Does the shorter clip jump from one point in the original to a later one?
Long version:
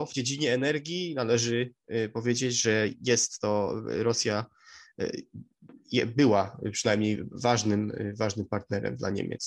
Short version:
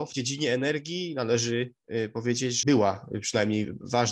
yes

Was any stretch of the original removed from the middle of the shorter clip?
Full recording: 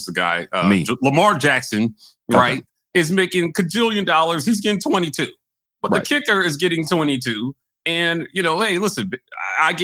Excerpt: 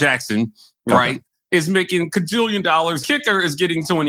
yes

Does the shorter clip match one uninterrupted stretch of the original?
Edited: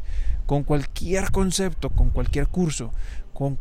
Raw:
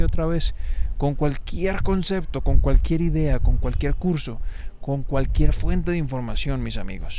no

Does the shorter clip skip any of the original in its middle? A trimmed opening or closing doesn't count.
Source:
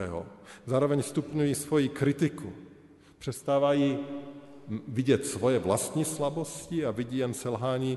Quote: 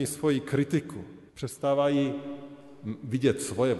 yes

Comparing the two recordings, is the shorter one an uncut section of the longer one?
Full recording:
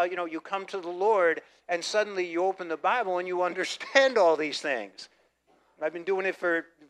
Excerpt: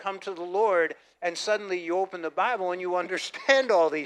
yes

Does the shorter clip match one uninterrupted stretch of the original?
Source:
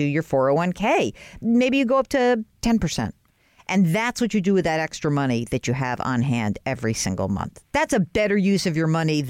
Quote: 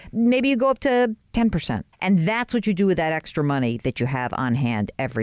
no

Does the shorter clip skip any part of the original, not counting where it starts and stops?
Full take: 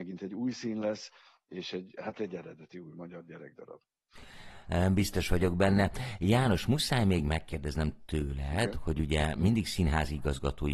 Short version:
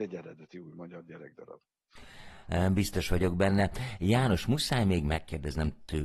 no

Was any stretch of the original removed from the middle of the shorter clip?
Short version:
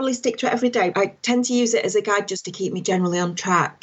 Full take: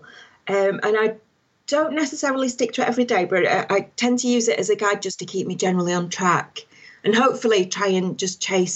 yes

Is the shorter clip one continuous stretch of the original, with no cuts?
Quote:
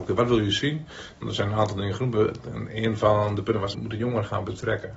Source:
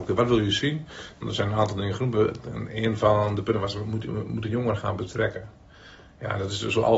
no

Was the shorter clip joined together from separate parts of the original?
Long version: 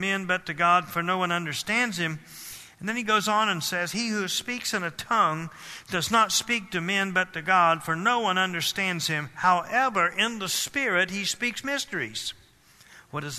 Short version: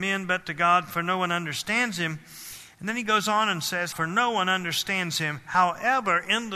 yes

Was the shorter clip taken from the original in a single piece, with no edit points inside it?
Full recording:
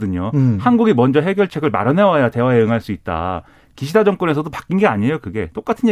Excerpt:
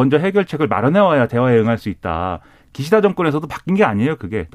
yes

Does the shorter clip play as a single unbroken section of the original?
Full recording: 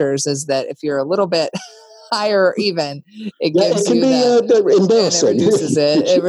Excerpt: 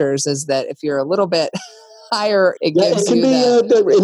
no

